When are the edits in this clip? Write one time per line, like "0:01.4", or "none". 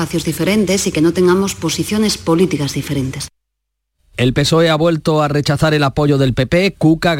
none